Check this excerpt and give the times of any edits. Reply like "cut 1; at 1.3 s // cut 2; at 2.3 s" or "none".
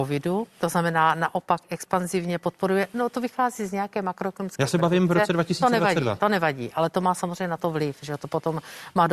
none